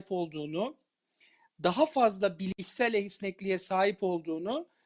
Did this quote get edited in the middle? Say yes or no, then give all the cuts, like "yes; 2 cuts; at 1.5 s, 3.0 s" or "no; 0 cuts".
no; 0 cuts